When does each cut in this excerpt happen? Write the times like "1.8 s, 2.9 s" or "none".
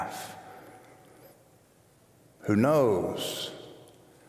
none